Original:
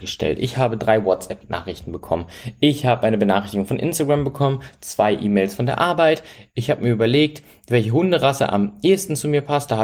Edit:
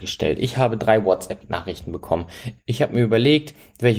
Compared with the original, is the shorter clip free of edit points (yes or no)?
no